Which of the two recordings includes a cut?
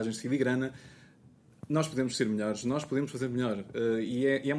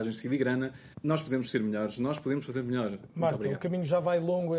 second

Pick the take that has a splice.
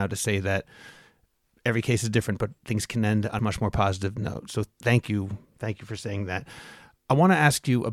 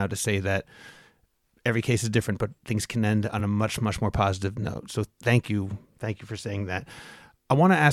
first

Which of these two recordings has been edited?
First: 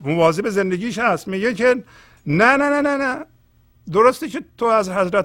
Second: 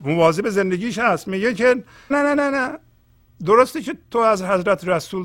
second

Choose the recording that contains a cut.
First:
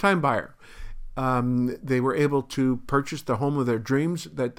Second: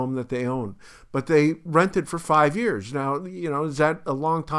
first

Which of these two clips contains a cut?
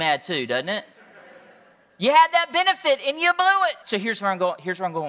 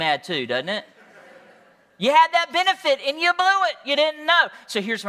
first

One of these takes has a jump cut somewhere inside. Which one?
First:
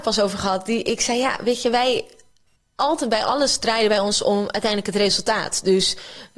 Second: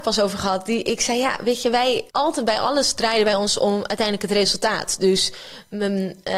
second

